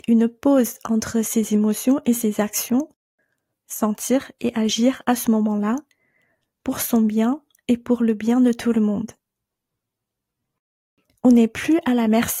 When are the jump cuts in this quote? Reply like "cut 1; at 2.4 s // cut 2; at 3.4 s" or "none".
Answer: cut 1; at 3.5 s